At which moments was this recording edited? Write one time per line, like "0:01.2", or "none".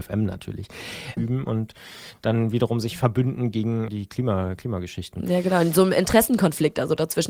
0:01.2
0:03.9